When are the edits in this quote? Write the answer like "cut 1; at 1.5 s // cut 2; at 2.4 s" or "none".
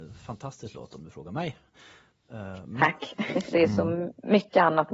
cut 1; at 3.5 s